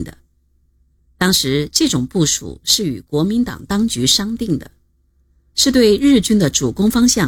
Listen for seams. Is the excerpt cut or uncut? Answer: uncut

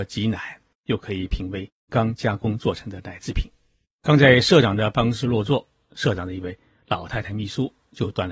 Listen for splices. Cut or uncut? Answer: cut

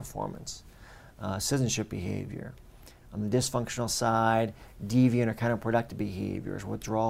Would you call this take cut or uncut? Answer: uncut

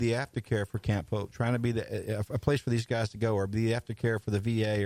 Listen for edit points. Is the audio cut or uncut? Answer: uncut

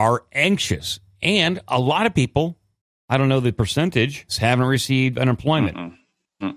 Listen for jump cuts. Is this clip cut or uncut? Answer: cut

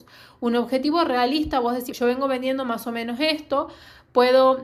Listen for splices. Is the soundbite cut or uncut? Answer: cut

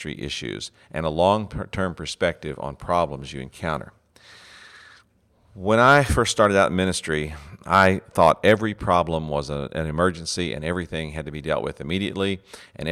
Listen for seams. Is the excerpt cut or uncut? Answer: uncut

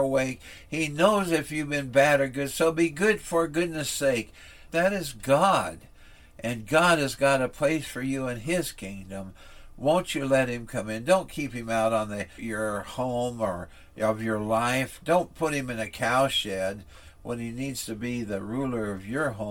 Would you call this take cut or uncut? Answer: cut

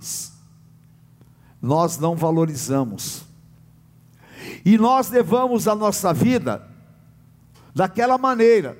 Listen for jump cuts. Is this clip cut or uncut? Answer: uncut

